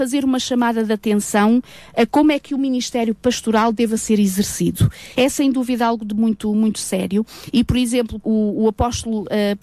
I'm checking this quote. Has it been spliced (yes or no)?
yes